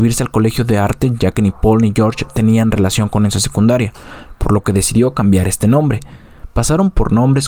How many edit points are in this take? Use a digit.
1